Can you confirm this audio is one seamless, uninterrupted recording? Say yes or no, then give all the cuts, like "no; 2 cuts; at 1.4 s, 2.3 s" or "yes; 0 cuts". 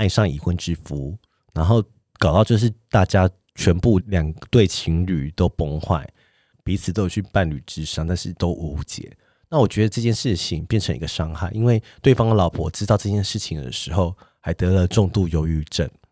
no; 1 cut; at 4.0 s